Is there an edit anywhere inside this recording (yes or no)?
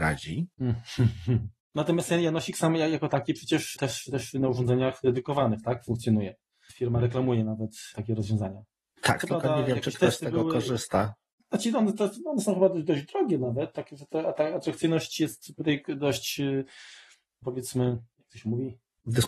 no